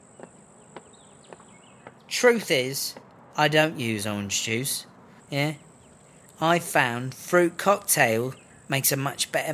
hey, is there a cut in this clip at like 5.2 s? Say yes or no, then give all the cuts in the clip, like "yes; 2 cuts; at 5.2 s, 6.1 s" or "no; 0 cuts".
yes; 1 cut; at 5.2 s